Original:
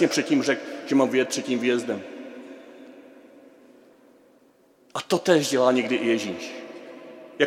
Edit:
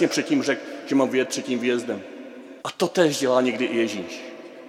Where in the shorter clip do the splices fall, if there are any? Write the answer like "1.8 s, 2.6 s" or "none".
2.6 s